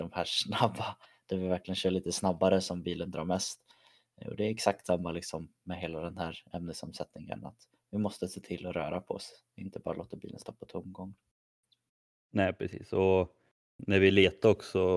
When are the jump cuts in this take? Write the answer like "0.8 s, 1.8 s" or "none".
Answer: none